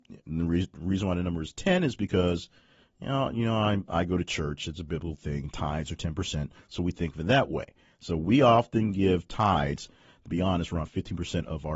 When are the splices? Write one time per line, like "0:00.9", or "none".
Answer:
none